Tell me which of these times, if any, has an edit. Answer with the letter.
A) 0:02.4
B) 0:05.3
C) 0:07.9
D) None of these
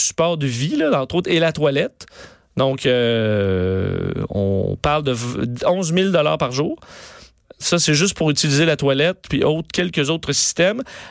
D